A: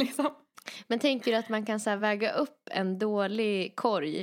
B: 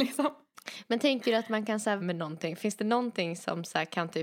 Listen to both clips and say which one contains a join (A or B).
B